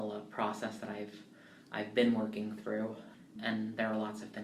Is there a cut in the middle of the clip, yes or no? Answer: yes